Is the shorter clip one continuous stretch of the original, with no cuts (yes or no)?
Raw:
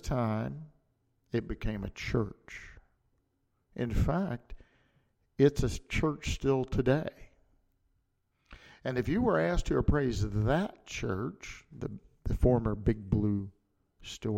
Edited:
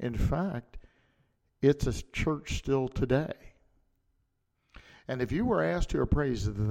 yes